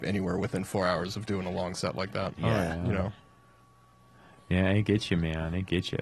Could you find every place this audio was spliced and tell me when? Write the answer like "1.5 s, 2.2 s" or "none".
none